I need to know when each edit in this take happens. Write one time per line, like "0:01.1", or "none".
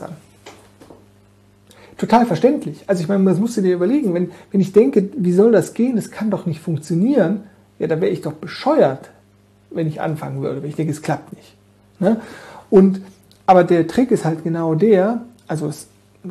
none

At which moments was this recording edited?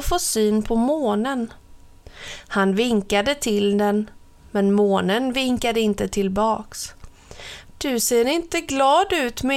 0:07.6

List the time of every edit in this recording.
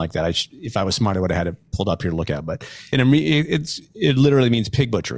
0:02.9

